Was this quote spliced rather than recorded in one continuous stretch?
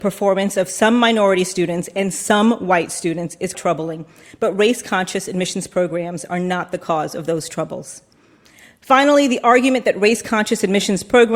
yes; 1 cut; at 3.5 s

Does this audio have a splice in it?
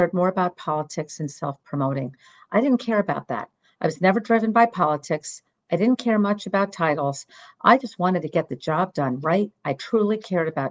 no; 0 cuts

